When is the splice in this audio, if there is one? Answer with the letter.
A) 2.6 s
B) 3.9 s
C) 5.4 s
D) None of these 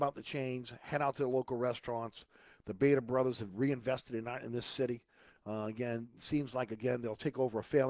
D